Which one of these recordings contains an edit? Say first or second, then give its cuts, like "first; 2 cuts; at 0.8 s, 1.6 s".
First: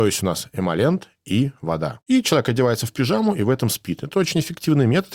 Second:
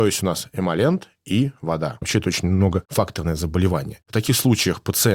second; 1 cut; at 2.0 s